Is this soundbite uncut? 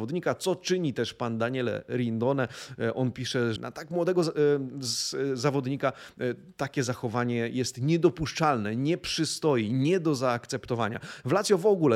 no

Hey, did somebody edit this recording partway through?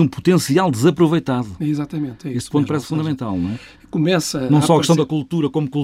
no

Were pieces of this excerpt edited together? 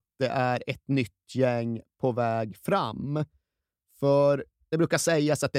no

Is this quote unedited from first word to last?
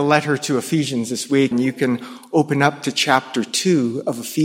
no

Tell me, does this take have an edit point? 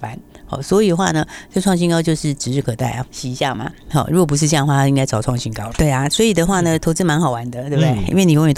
yes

